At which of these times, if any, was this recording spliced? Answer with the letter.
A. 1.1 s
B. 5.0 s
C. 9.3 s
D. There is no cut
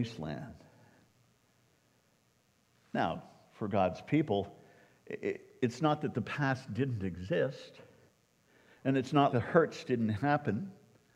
C